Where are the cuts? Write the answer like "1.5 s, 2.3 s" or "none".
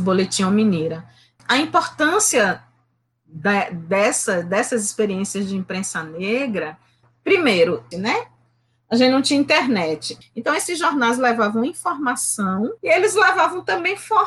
7.9 s, 10.2 s, 12.8 s